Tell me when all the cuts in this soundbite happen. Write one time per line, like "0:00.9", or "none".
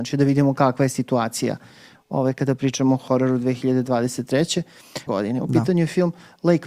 0:05.1